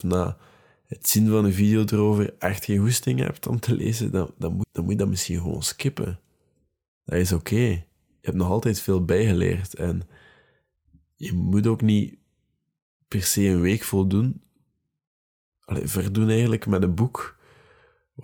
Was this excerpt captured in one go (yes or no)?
no